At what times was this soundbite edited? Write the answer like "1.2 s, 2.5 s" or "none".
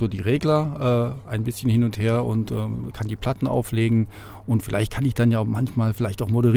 none